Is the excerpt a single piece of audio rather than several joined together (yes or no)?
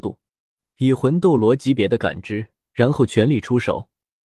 no